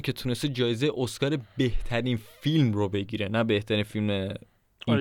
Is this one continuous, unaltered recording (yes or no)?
yes